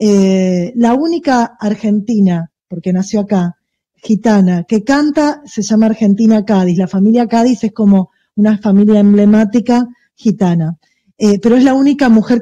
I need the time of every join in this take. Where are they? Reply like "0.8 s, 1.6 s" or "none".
none